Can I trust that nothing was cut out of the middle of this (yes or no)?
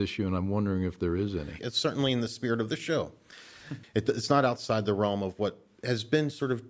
no